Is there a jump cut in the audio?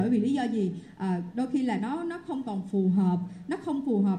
no; 0 cuts

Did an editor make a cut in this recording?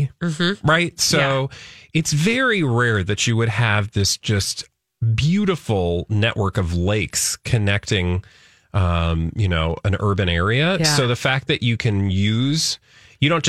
no; 0 cuts

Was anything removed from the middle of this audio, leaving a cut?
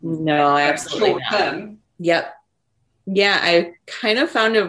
yes; 1 cut; at 1.9 s

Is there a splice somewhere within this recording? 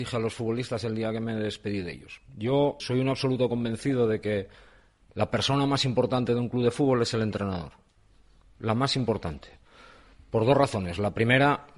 yes; 1 cut; at 2.8 s

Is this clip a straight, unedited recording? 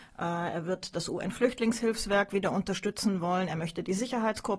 yes; 0 cuts

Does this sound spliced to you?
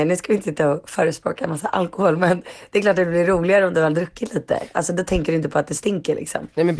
no; 0 cuts

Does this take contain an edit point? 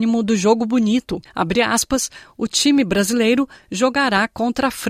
yes; 1 cut; at 1.3 s

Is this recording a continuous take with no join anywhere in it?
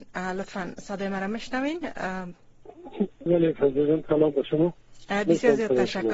no; 1 cut; at 3.3 s

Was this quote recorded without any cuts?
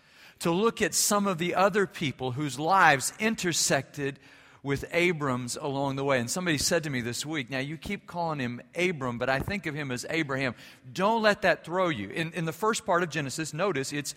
yes; 0 cuts

